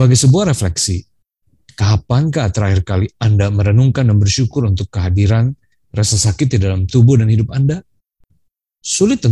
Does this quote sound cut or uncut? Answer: uncut